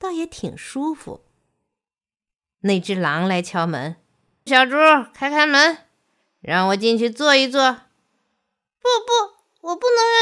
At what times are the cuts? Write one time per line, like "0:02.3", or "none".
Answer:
0:04.5